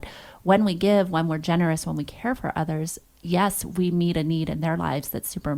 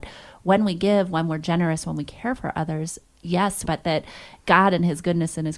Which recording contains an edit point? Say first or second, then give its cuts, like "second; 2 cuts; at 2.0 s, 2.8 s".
second; 1 cut; at 3.7 s